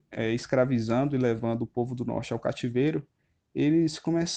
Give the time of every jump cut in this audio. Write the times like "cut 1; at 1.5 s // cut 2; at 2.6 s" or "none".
none